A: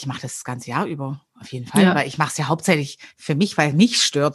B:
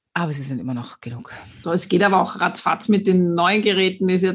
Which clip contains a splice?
B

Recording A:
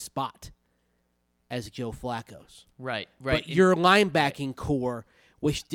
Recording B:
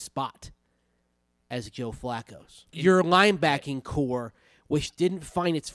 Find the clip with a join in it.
B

